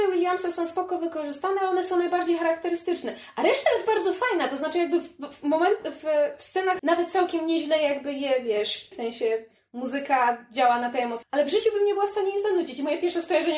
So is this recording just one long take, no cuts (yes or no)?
no